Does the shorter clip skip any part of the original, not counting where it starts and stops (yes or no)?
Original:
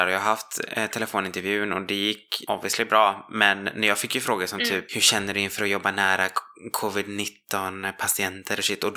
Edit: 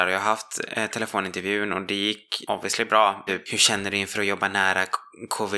yes